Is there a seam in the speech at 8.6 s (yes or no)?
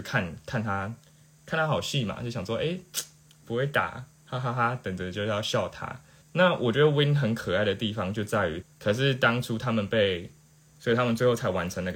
yes